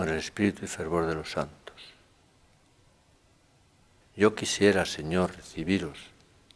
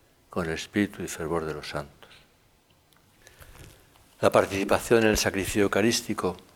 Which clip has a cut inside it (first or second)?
first